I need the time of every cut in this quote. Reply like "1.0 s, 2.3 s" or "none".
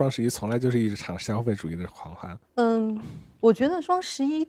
2.4 s